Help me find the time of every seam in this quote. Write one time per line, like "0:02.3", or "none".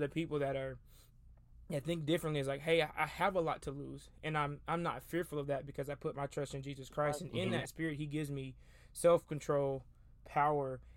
none

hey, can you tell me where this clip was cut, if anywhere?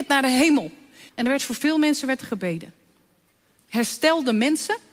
0:01.1
0:03.6

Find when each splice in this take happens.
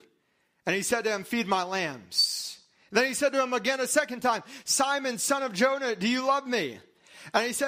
none

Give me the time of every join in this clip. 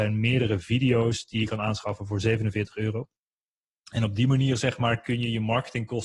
none

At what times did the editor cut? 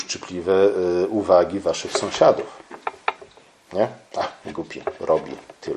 none

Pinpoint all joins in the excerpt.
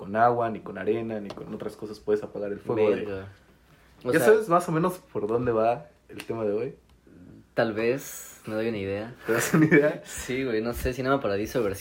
0:08.4

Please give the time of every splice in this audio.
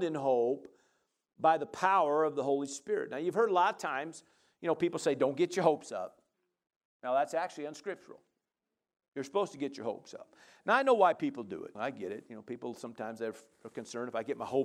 0:11.7

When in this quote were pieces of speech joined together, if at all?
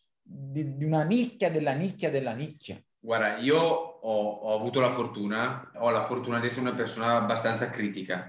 0:05.7

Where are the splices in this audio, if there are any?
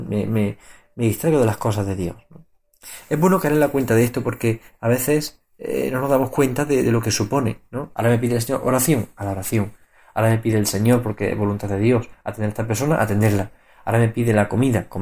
0:07.9

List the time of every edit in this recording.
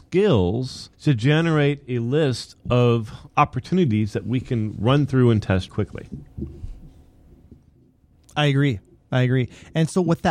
0:00.9
0:05.7

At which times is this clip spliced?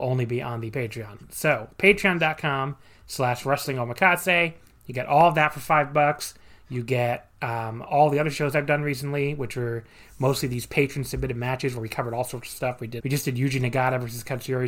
0:13.0

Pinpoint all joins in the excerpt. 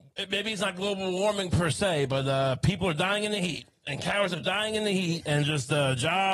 none

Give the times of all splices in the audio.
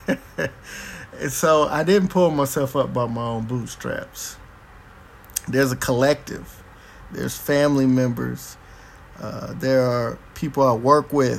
0:07.1

